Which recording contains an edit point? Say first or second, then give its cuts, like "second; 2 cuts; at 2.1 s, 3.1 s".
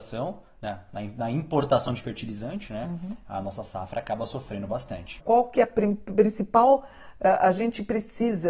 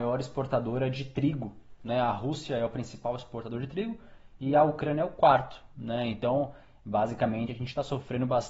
first; 1 cut; at 5.2 s